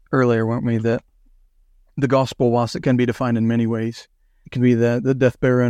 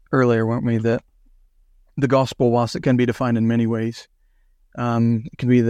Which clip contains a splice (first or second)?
first